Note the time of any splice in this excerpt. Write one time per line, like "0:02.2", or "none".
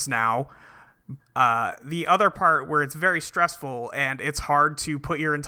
0:01.2